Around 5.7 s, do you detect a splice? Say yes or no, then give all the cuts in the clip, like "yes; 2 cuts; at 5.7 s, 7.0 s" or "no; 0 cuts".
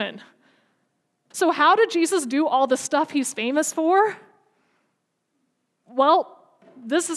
no; 1 cut; at 1.3 s